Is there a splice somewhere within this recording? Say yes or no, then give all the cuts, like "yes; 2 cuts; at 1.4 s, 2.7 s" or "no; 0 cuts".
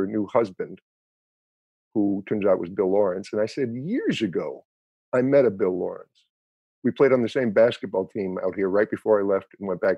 no; 0 cuts